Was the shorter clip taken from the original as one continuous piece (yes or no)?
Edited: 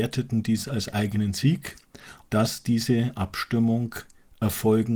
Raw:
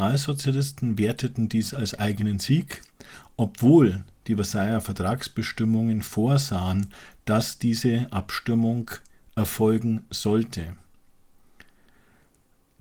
no